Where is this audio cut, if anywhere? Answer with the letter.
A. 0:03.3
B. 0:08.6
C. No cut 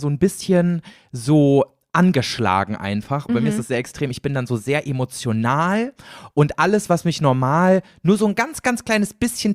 A